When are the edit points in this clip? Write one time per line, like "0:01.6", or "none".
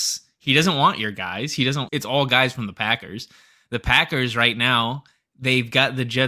0:01.9